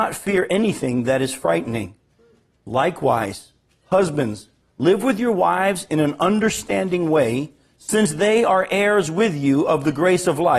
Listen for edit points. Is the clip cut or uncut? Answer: cut